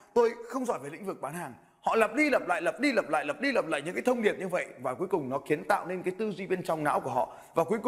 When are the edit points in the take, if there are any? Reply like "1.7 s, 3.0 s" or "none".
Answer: none